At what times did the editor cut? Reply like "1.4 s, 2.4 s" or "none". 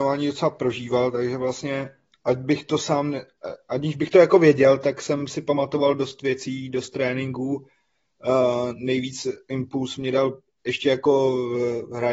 none

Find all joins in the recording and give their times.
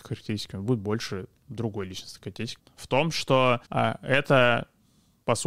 2.6 s, 3.6 s

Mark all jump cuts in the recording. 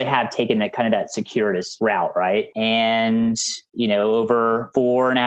2.5 s

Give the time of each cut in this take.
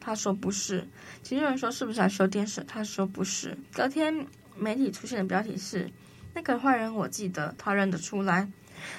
3.6 s, 7.6 s

